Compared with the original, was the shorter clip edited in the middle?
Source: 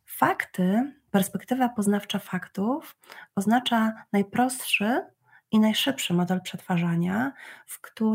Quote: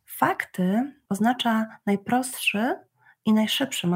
yes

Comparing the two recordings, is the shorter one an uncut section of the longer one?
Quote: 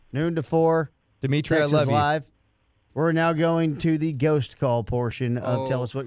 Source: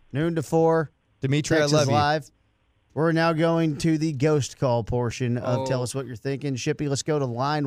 yes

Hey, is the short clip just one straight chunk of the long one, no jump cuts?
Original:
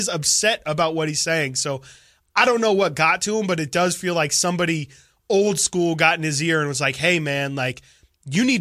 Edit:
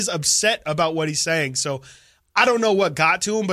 yes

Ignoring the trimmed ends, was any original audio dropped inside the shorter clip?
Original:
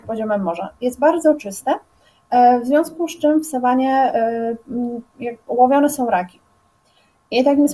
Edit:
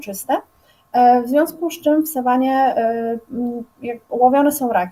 no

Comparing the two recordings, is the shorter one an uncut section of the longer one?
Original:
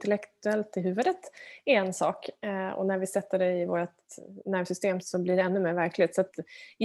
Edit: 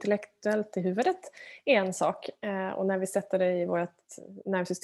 yes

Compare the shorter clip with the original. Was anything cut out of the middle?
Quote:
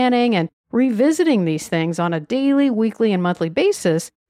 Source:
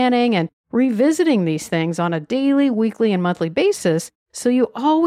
no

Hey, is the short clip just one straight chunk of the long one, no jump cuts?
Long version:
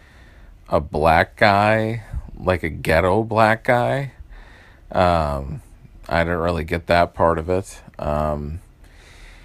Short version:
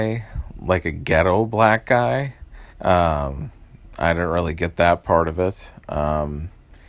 no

